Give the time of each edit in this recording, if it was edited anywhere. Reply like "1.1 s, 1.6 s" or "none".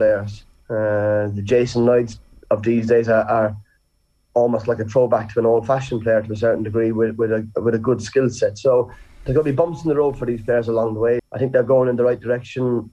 11.2 s